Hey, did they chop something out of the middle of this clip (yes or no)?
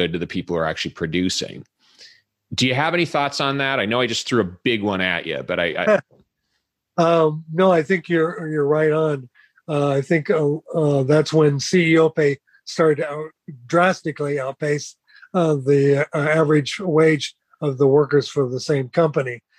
no